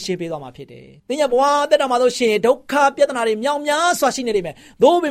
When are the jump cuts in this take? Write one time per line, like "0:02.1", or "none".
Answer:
0:01.0